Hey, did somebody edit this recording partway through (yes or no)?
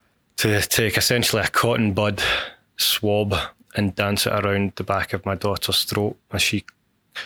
yes